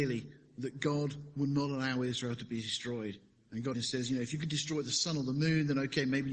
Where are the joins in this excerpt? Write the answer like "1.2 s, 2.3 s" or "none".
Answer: 3.7 s